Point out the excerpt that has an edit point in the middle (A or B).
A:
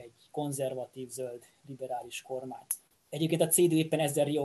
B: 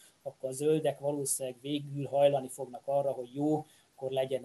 A